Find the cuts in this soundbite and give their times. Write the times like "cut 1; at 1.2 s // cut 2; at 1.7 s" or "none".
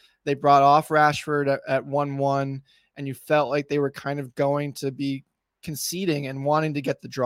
none